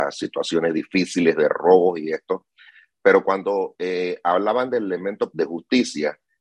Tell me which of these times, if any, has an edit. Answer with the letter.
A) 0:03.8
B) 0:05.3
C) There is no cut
B